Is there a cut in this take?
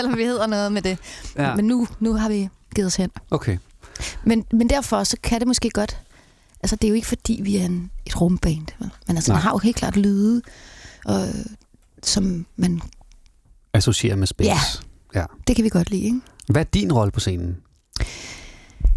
no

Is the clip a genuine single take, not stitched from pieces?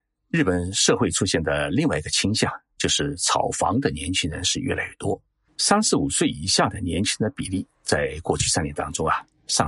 no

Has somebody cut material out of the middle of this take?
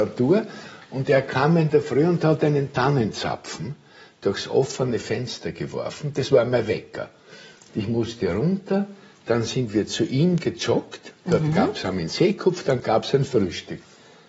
no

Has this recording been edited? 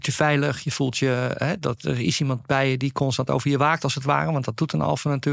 no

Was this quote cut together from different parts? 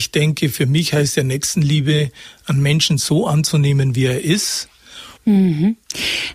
yes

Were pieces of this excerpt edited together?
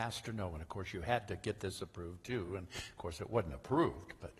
no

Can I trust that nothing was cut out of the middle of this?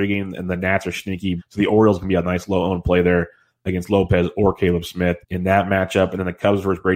no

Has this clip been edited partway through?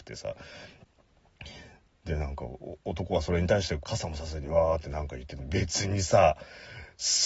yes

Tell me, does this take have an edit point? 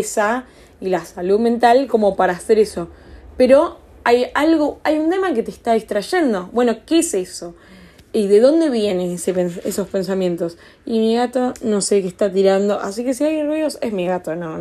no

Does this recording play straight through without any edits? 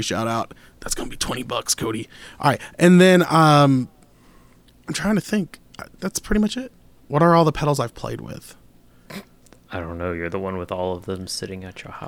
no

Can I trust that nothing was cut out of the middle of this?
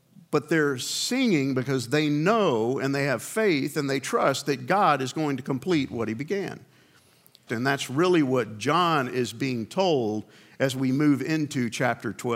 no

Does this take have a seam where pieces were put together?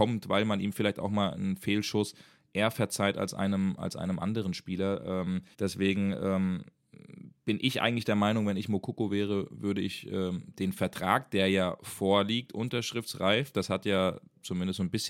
yes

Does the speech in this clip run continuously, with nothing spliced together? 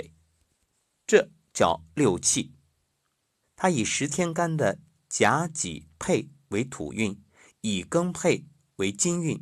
no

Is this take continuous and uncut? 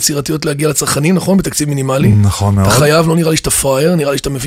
yes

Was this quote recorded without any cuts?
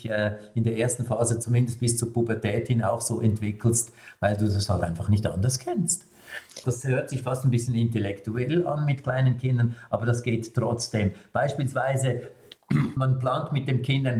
no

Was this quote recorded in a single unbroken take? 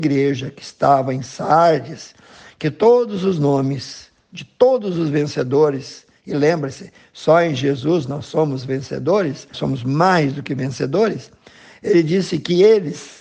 no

